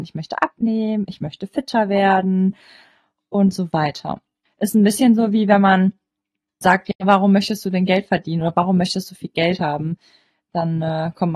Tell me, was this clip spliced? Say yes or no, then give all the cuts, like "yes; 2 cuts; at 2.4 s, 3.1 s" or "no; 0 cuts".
yes; 2 cuts; at 4.5 s, 6.6 s